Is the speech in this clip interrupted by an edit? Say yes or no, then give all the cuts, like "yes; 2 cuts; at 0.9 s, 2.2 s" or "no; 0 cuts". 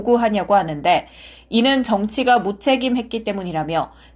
no; 0 cuts